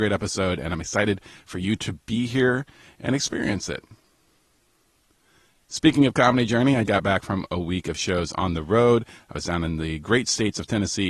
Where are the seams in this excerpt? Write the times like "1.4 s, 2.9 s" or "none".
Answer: 6.9 s